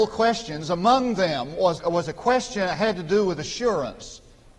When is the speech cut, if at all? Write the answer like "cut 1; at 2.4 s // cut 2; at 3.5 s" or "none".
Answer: cut 1; at 1.8 s